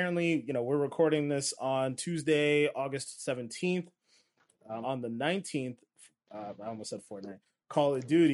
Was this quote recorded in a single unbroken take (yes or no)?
no